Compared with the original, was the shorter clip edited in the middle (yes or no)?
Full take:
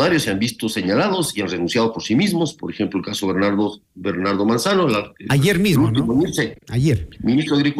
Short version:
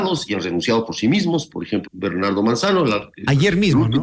yes